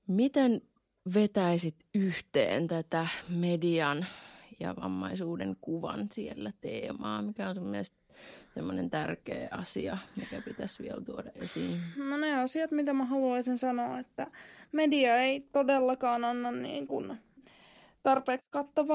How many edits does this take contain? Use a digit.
1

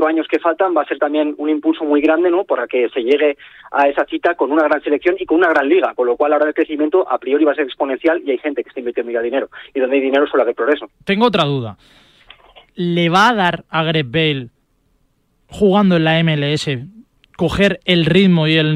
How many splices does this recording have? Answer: 1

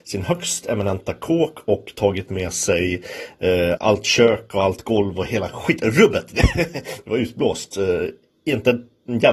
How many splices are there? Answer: 1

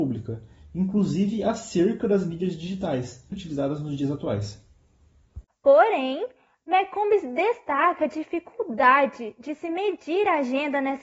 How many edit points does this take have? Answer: 1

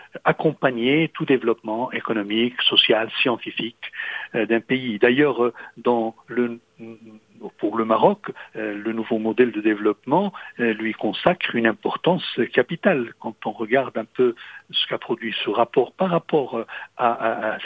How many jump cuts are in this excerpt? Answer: 0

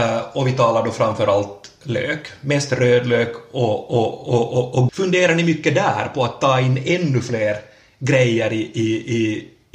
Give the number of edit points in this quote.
1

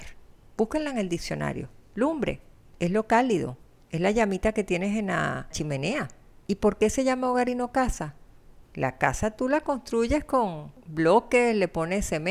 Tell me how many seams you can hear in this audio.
1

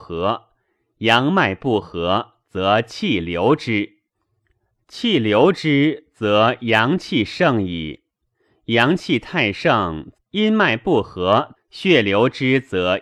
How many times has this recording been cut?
2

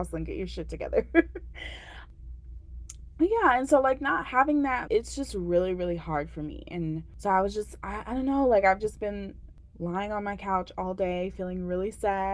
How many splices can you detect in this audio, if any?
1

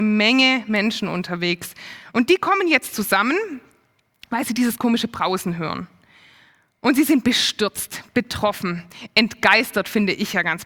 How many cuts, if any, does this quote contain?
0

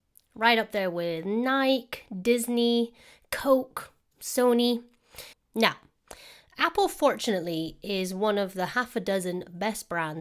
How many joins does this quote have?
1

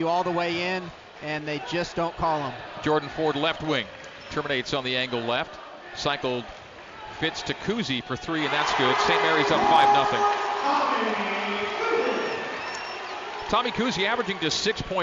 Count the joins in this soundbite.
0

